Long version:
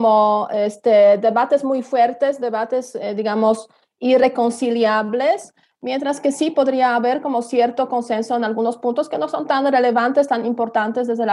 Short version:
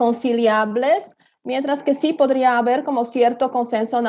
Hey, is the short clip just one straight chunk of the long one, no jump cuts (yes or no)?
yes